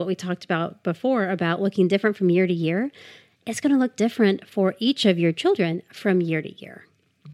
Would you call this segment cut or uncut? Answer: uncut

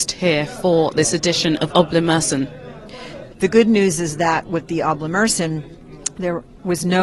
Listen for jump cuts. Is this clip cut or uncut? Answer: cut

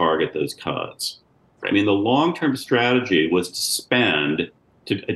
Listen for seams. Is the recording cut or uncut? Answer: cut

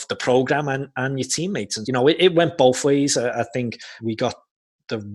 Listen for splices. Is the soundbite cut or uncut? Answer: cut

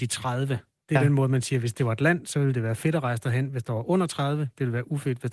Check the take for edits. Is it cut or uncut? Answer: uncut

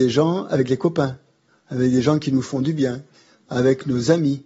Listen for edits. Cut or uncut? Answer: uncut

